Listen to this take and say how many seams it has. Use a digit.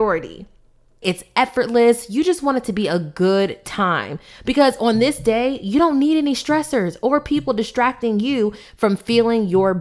1